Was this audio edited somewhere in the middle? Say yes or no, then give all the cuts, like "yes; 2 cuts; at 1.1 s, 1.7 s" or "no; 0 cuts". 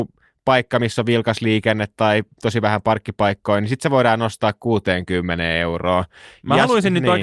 no; 0 cuts